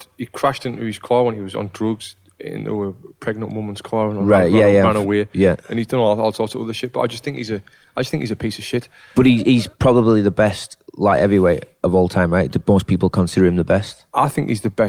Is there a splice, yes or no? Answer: no